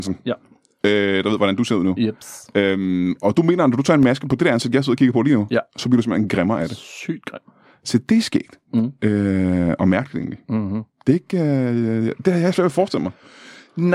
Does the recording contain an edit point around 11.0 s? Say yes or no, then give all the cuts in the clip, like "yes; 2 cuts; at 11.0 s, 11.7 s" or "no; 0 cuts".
no; 0 cuts